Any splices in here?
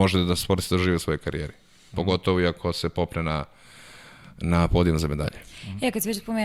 no; 0 cuts

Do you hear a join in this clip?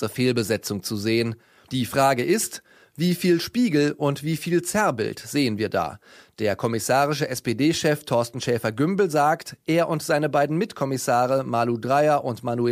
no; 0 cuts

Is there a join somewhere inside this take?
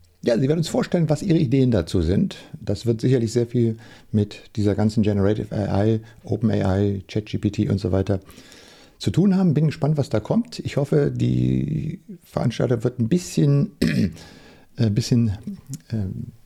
no; 0 cuts

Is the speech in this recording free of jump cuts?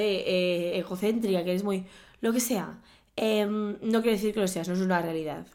yes; 0 cuts

